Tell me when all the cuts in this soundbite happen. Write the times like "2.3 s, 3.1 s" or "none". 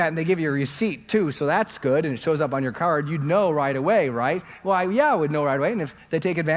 none